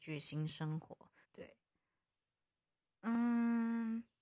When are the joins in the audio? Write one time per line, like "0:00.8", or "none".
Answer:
0:01.2